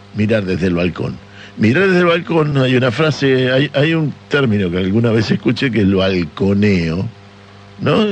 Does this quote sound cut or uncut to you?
uncut